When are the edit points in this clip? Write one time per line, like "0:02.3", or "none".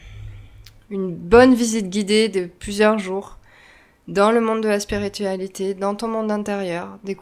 none